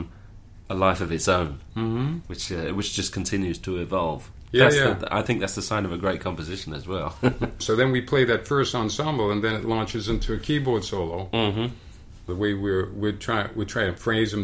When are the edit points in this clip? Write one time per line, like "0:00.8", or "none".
0:07.6
0:12.3